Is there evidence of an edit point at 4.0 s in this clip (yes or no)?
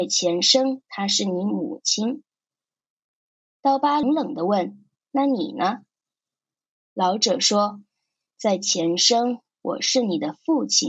yes